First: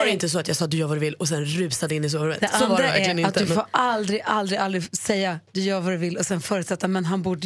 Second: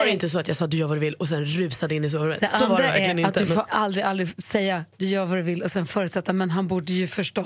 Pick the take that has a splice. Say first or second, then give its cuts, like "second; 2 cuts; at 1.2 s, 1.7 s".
second; 1 cut; at 3.7 s